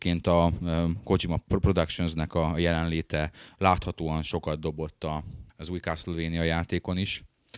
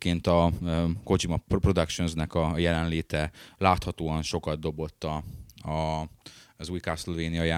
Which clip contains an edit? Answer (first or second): first